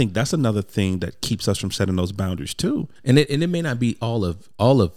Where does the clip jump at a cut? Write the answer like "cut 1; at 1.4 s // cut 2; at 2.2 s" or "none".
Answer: cut 1; at 3.0 s